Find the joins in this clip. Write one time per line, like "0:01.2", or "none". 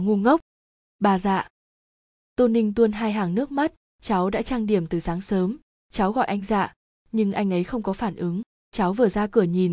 0:05.8